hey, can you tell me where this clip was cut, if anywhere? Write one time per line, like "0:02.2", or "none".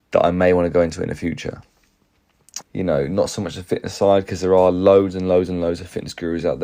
0:02.6